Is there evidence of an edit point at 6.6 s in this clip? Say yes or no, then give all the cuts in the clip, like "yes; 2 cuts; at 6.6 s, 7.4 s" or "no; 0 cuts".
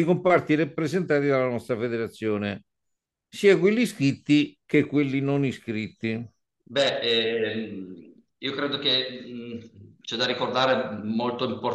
yes; 1 cut; at 6.6 s